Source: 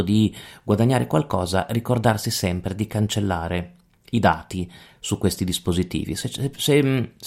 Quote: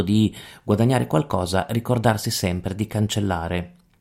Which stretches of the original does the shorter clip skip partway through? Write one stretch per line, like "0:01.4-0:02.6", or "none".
none